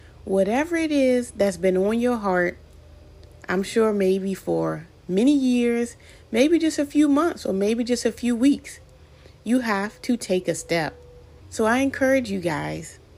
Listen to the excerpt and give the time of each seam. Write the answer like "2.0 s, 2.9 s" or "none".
11.4 s